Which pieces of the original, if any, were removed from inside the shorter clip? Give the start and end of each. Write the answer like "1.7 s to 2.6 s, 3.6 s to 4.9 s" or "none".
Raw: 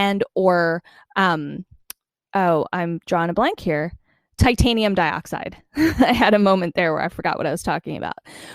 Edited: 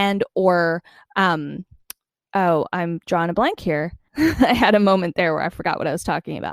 4.1 s to 5.7 s